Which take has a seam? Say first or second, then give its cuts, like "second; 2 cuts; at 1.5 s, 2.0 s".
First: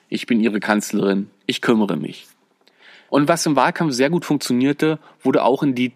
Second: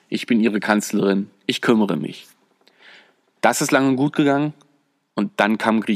first; 1 cut; at 3.1 s